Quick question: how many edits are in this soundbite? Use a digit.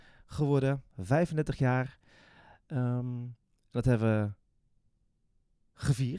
0